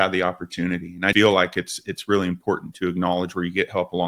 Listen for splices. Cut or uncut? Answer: cut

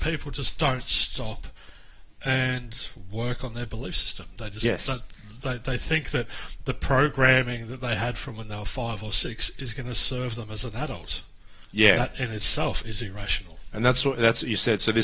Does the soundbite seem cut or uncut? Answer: uncut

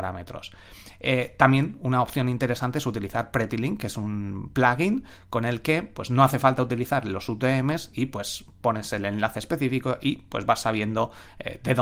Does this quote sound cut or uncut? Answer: uncut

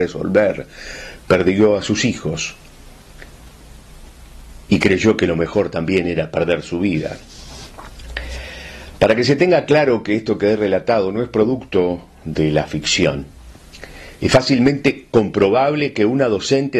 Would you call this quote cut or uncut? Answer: uncut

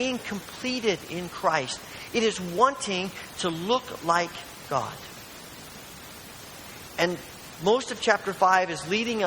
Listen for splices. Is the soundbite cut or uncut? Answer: uncut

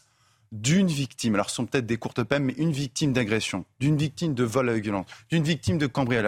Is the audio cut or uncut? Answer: uncut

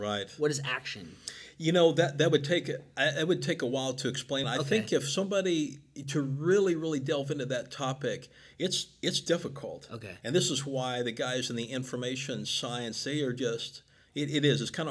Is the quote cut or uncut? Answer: cut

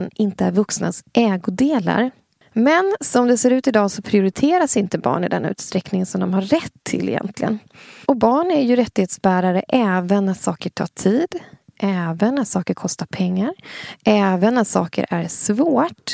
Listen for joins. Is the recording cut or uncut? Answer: cut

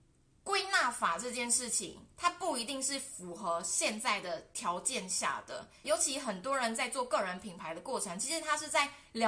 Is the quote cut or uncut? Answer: cut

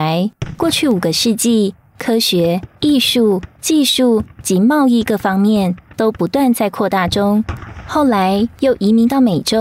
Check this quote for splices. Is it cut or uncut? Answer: cut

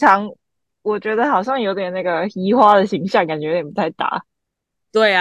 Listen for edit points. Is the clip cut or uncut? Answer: uncut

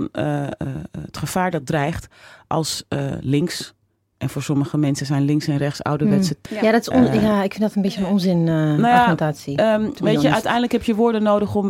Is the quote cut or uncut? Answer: cut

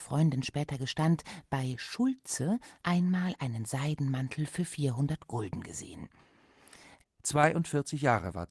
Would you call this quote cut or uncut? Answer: cut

